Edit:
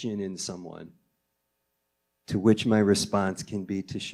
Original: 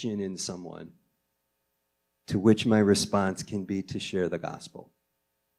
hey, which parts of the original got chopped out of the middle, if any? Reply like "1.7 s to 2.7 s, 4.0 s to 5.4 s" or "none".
none